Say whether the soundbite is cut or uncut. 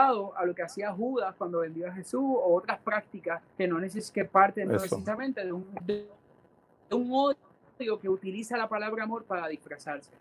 cut